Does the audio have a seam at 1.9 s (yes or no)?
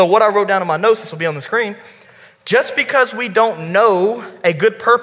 no